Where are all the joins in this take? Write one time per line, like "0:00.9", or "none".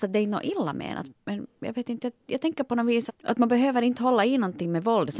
0:01.1
0:03.1